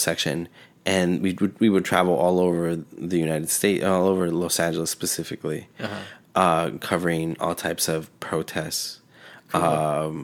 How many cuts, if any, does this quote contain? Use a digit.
0